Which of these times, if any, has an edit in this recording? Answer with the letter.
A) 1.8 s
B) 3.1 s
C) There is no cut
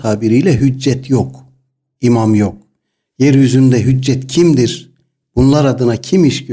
B